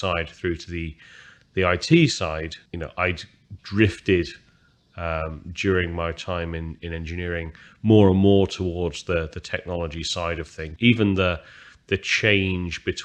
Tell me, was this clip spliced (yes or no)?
yes